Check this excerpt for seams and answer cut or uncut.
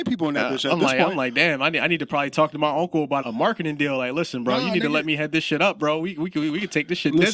cut